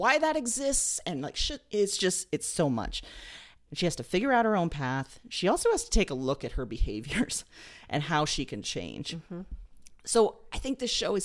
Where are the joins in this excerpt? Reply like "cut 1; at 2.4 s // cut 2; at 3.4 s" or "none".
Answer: cut 1; at 3.7 s